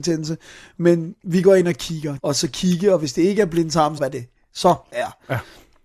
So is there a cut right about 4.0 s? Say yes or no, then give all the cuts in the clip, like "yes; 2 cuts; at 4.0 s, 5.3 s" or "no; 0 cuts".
yes; 2 cuts; at 2.2 s, 4.0 s